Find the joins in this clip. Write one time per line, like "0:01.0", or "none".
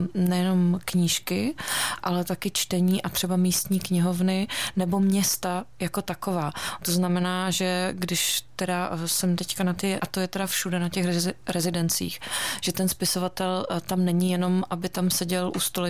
0:06.8
0:10.0

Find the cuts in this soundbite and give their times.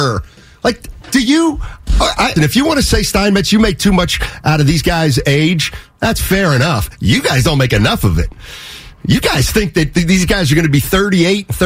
0:02.4

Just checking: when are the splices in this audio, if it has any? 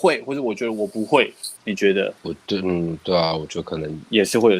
0:01.6

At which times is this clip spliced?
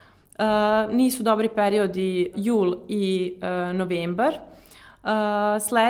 0:02.3

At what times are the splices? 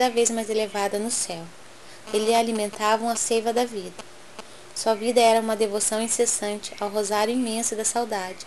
0:02.1
0:04.7

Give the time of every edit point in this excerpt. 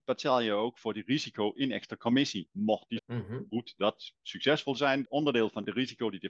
0:03.0
0:05.0

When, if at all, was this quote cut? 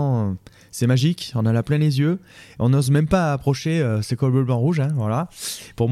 none

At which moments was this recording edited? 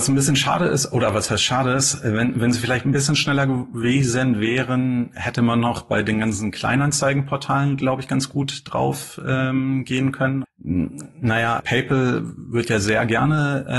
0:10.4
0:11.6

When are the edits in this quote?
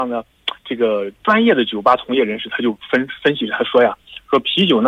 none

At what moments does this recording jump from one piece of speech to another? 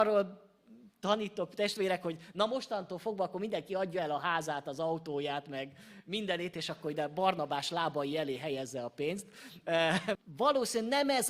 0:10.2

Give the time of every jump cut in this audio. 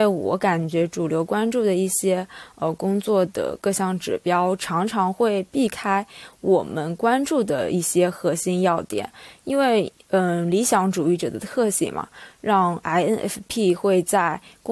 none

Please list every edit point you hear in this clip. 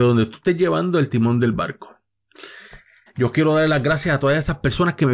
0:03.1

